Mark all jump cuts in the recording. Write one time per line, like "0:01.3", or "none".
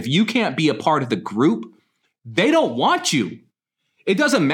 none